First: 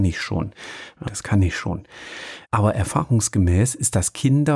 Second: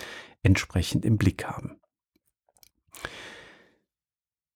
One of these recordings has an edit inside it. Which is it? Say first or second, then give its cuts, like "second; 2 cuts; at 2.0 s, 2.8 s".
first; 2 cuts; at 1.1 s, 2.4 s